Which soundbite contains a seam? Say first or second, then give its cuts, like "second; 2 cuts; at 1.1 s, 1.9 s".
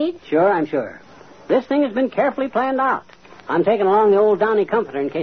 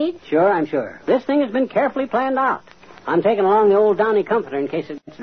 second; 1 cut; at 1.0 s